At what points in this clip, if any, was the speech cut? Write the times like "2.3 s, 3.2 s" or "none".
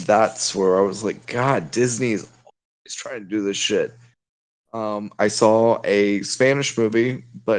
none